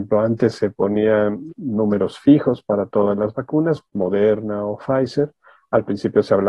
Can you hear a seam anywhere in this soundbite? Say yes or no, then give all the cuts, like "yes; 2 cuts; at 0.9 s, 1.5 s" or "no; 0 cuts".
yes; 2 cuts; at 1.5 s, 3.9 s